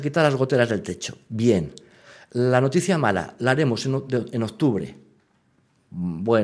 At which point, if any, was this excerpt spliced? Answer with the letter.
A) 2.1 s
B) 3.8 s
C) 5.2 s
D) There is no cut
D